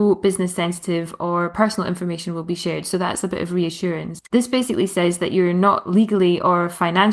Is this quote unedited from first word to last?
no; 1 cut; at 4.3 s

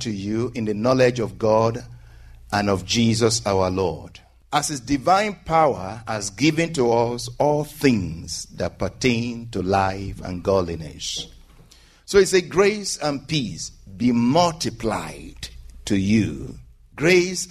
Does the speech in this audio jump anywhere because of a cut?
no; 0 cuts

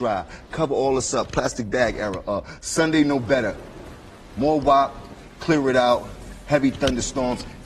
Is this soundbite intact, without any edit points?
yes; 0 cuts

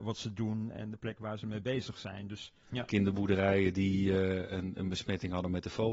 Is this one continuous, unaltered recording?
no; 1 cut; at 2.6 s

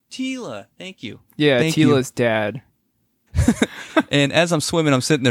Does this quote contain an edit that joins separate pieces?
yes; 1 cut; at 3.3 s

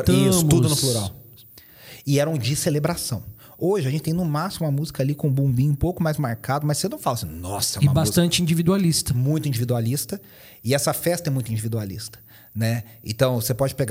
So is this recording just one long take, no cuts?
yes; 0 cuts

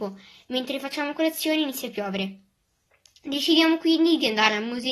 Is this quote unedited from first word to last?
yes; 0 cuts

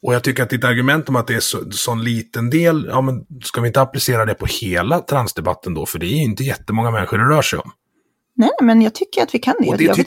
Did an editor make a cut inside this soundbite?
no; 0 cuts

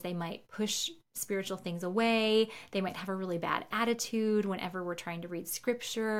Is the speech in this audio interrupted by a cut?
no; 0 cuts

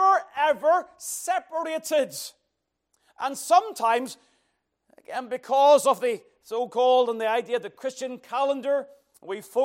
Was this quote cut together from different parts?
no; 0 cuts

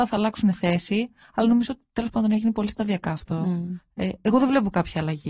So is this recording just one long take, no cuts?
yes; 0 cuts

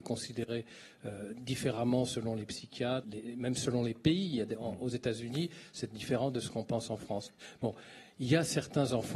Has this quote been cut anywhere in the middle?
yes; 1 cut; at 3.0 s

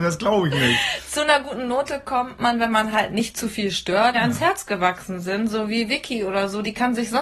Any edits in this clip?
yes; 1 cut; at 4.1 s

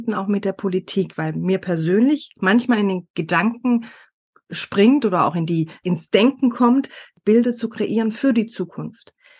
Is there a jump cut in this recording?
yes; 1 cut; at 7.2 s

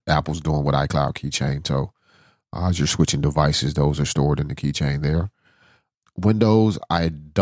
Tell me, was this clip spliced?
no; 0 cuts

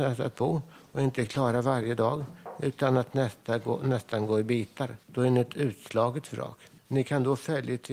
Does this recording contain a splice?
yes; 2 cuts; at 5.0 s, 6.8 s

